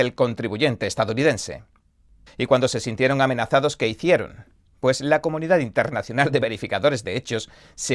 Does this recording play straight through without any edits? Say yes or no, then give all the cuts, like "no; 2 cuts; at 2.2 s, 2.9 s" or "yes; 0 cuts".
no; 1 cut; at 2.3 s